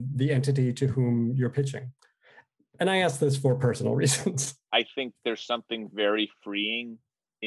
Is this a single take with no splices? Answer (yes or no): no